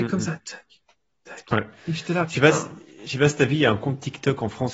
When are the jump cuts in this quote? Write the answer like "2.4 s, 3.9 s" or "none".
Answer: none